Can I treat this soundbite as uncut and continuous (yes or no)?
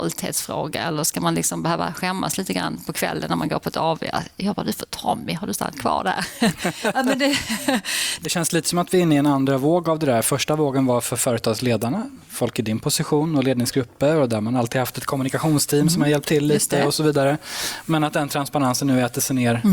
yes